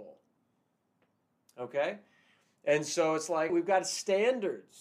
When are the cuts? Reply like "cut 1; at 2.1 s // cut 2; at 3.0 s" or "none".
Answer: cut 1; at 3.5 s